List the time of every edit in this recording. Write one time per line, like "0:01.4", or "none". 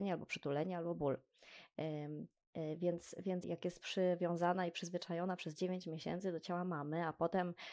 0:03.4